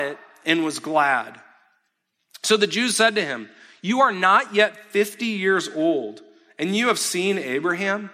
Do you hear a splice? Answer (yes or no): no